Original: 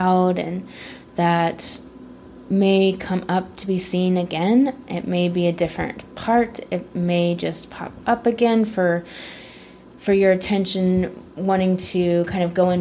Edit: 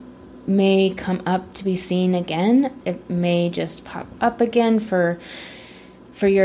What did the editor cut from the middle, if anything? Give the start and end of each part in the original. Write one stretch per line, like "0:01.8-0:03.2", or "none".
0:04.8-0:06.7